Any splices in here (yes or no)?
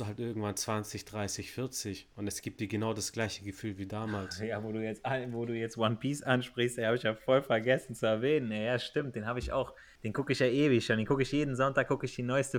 no